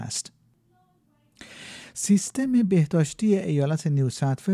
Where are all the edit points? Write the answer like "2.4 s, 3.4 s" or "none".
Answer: none